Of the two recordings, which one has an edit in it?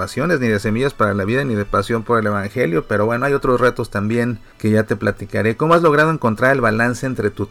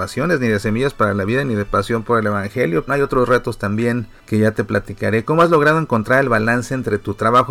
second; 1 cut; at 2.9 s

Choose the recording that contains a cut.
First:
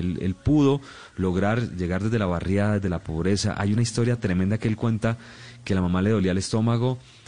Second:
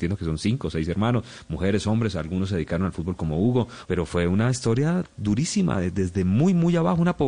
second; 1 cut; at 3.8 s

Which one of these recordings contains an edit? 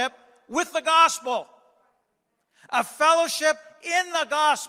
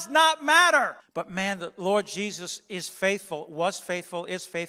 second; 1 cut; at 1.0 s

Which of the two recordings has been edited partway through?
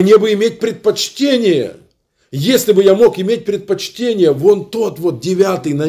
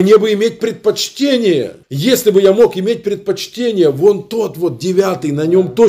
second; 1 cut; at 1.8 s

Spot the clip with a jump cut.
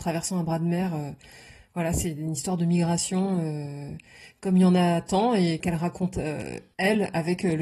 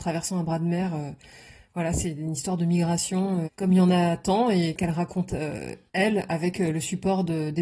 second; 1 cut; at 3.4 s

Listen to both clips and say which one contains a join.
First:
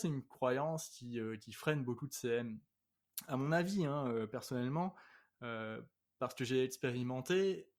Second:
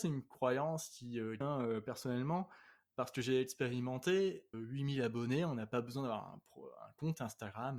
second; 3 cuts; at 1.4 s, 2.9 s, 4.5 s

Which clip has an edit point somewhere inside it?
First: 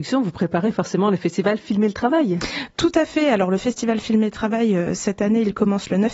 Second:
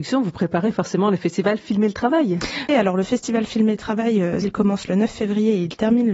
second; 2 cuts; at 2.7 s, 4.4 s

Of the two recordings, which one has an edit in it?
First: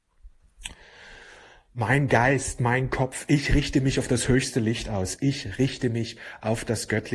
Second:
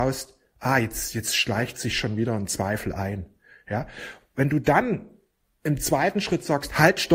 first; 1 cut; at 5.2 s

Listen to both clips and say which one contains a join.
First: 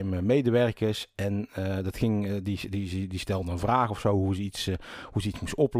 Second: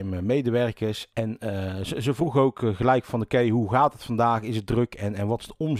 second; 1 cut; at 1.1 s

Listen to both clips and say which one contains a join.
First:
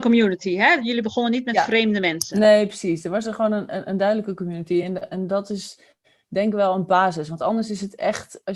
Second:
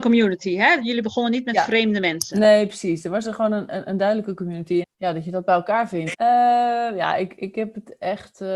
second; 2 cuts; at 4.8 s, 6.1 s

